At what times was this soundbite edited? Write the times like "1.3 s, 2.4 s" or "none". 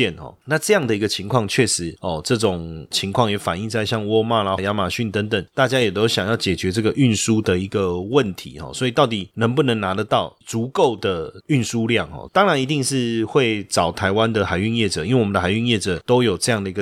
4.6 s, 12.3 s